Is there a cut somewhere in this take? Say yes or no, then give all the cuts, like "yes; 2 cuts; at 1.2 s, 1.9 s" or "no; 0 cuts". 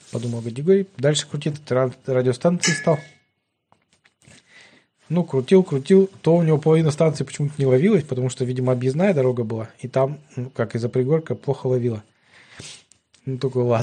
no; 0 cuts